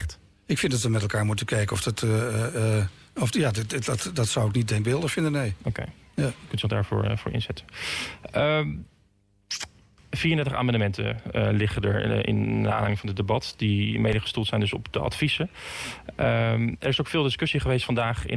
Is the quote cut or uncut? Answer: uncut